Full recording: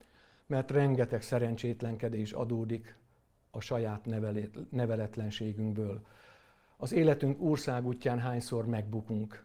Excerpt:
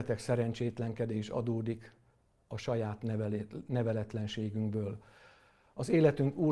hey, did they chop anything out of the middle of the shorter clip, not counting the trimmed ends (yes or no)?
no